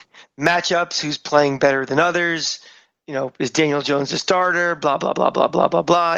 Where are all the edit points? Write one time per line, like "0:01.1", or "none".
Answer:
none